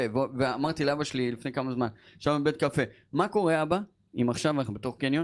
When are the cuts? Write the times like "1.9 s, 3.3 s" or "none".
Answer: none